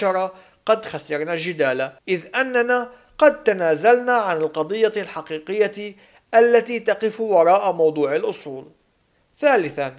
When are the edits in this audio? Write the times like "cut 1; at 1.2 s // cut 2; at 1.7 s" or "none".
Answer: cut 1; at 2.0 s